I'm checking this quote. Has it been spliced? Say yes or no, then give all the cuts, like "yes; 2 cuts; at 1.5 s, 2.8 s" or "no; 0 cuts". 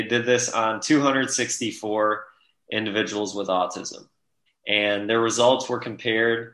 yes; 1 cut; at 4.5 s